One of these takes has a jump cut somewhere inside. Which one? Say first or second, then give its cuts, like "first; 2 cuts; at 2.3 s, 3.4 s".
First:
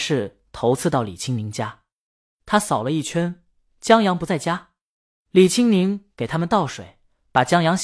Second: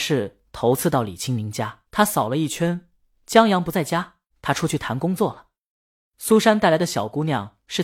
second; 2 cuts; at 1.8 s, 4.3 s